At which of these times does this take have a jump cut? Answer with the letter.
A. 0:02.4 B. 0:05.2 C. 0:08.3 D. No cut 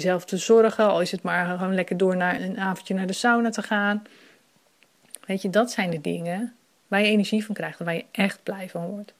A